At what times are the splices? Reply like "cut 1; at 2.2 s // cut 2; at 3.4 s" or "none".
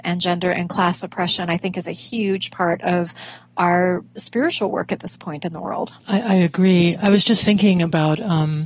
cut 1; at 6.0 s